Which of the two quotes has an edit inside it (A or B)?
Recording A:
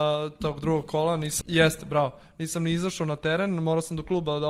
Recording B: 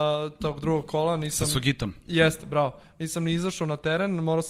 A